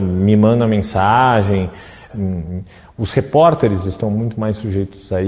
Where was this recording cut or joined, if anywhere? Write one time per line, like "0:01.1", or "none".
0:02.1